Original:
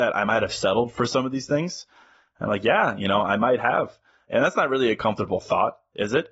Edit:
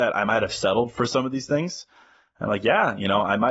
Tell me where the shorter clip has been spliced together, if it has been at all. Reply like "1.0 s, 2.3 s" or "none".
none